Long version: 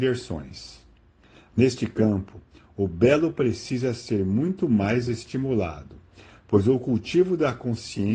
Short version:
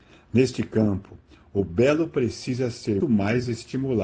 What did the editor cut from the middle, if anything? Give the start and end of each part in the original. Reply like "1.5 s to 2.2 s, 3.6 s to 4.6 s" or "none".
4.2 s to 4.6 s